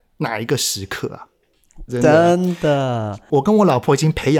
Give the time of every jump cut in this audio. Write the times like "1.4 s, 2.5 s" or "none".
1.9 s